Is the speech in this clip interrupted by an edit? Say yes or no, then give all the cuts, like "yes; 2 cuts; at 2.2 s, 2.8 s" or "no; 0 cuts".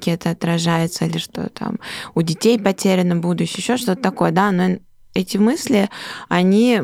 no; 0 cuts